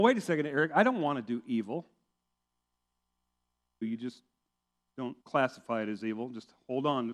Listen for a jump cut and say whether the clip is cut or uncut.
cut